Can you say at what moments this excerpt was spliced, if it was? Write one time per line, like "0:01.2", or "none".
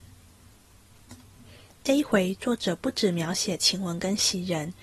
none